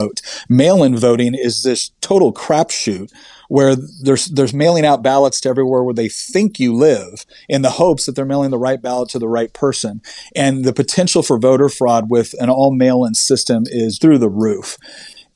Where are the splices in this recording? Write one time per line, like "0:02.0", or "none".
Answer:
0:14.0